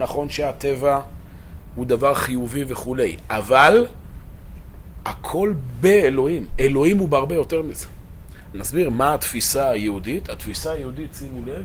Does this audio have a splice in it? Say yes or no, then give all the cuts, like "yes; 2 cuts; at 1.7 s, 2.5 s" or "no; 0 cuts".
yes; 1 cut; at 8.5 s